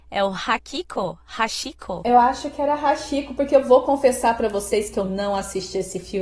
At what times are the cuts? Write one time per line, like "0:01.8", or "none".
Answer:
none